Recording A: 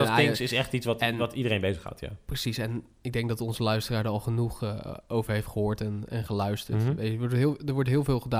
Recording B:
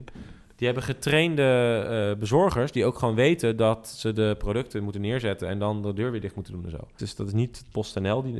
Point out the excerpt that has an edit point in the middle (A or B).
B